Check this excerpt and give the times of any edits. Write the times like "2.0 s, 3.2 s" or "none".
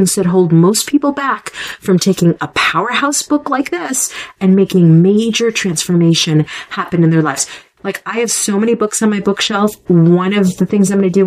7.8 s